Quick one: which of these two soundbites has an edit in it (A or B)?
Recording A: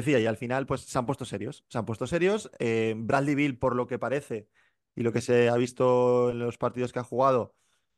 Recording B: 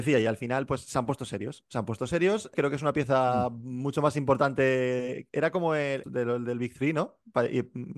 B